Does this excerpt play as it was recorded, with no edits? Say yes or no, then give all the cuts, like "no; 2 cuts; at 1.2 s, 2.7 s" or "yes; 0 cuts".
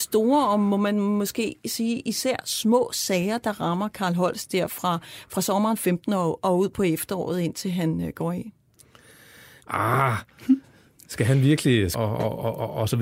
no; 2 cuts; at 9.6 s, 11.9 s